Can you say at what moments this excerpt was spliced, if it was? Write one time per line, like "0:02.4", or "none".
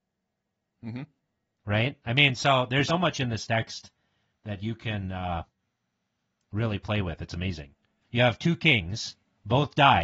0:02.9
0:08.0